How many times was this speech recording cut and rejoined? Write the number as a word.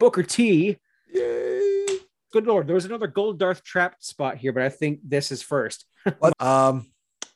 two